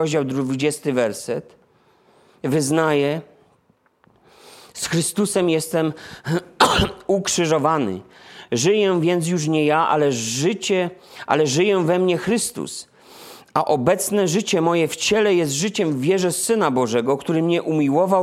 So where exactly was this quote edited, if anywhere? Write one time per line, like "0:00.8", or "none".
none